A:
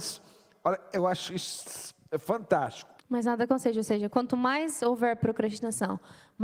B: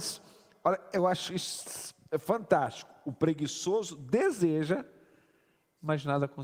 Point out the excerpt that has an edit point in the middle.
A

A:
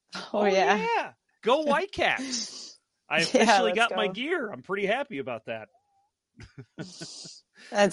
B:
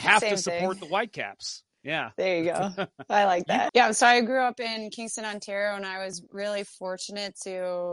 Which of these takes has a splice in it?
B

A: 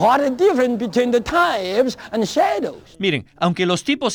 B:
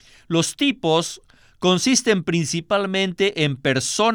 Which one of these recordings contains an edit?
A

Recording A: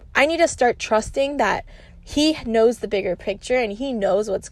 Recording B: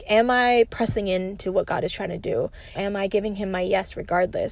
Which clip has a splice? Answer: B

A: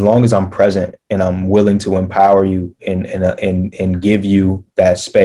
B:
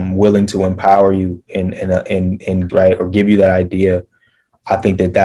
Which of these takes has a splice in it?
B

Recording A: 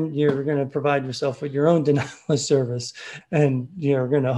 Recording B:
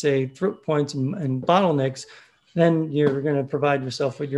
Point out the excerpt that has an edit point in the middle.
A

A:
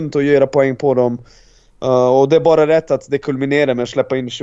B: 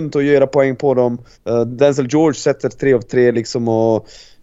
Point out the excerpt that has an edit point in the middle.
B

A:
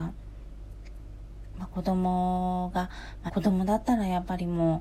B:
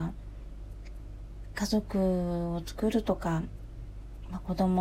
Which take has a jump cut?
A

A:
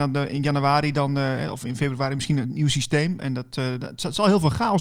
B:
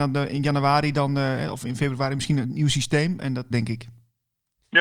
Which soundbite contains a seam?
B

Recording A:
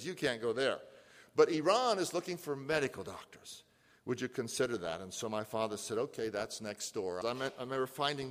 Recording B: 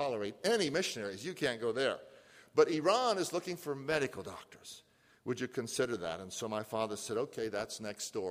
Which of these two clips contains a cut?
A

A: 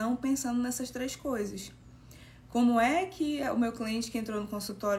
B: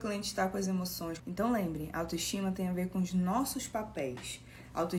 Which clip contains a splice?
B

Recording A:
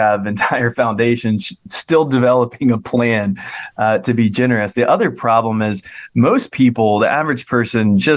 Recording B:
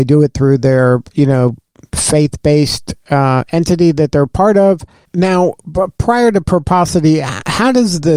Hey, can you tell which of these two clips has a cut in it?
B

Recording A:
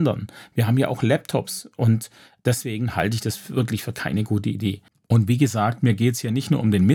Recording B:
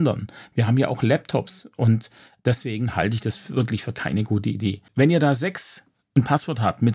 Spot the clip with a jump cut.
B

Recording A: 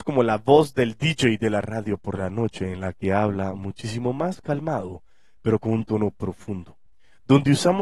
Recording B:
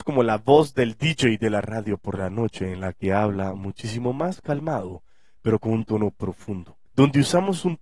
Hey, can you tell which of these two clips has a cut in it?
B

